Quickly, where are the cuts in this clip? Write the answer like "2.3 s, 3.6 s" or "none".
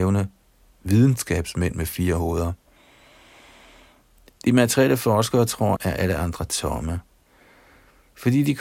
5.8 s